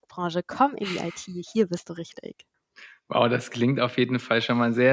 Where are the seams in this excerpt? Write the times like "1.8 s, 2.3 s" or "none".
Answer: none